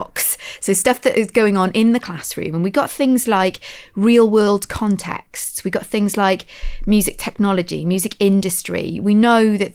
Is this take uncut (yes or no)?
yes